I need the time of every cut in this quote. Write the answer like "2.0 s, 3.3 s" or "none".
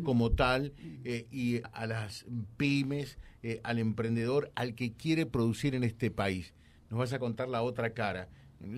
1.6 s